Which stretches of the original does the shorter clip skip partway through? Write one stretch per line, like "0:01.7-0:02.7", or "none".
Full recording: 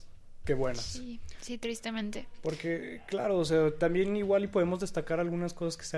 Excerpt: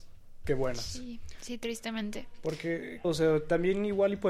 0:03.0-0:03.4